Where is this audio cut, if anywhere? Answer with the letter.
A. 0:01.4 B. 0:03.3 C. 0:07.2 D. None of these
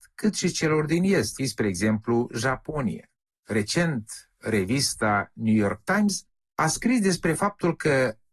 A